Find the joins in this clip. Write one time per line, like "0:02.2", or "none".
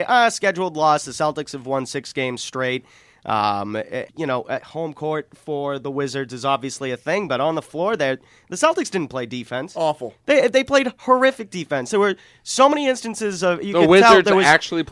0:04.1